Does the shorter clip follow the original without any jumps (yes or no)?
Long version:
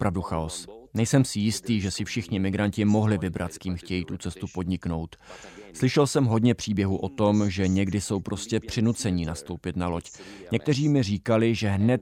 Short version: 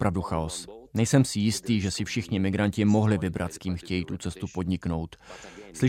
yes